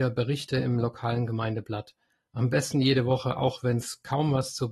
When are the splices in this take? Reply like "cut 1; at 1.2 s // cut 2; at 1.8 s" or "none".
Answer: none